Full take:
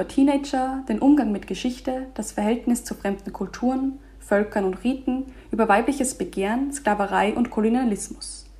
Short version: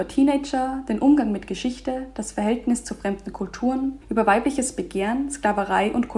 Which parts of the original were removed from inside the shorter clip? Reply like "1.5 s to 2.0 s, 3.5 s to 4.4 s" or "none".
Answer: 4.0 s to 5.4 s